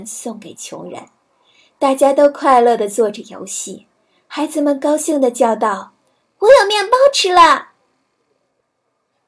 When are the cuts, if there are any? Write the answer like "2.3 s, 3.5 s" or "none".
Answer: none

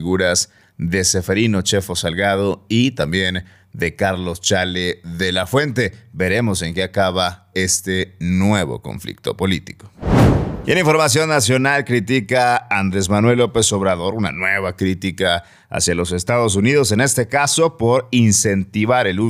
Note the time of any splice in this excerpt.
none

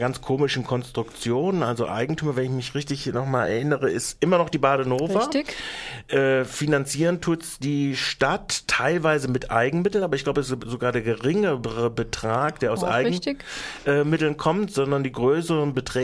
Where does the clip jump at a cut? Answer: none

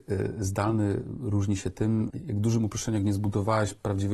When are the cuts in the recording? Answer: 2.1 s

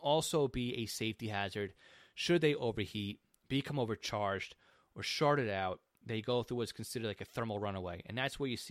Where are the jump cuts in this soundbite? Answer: none

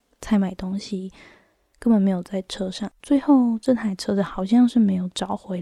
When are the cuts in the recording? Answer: 3.0 s

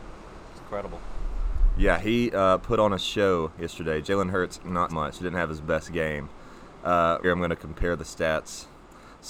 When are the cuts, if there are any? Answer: 4.9 s, 7.2 s

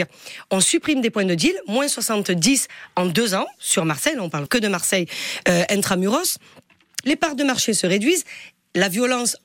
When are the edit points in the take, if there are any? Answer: 4.5 s, 7.0 s

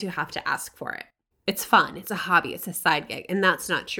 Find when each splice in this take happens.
1.3 s

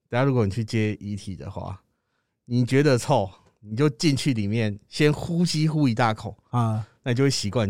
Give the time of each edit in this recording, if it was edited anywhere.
none

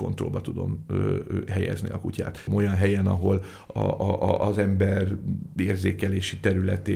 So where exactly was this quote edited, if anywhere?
2.5 s, 3.7 s

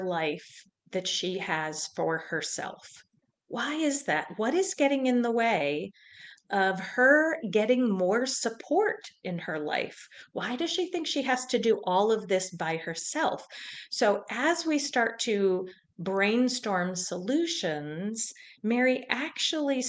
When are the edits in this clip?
none

